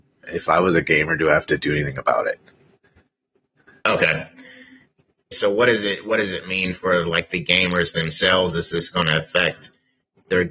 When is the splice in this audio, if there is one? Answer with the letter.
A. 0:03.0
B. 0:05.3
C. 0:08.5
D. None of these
B